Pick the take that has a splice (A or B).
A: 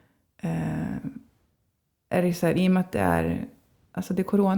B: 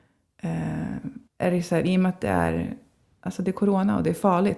B